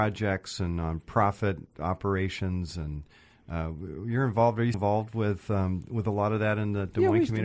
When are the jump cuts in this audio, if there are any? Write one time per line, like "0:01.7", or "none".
0:04.7